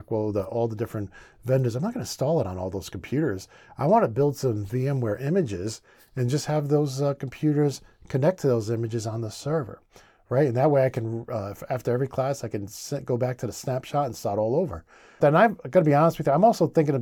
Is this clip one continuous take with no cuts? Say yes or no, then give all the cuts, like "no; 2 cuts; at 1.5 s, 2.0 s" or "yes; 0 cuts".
no; 1 cut; at 15.2 s